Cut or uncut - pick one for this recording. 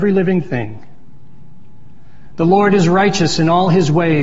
uncut